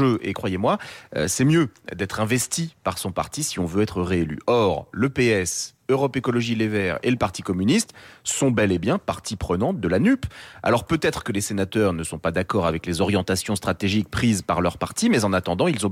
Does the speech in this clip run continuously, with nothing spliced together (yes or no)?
yes